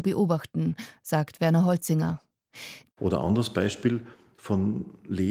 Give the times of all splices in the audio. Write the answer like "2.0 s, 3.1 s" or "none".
2.9 s